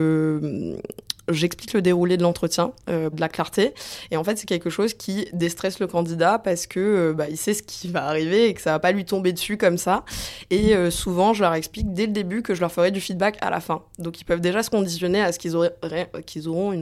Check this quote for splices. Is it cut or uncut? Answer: cut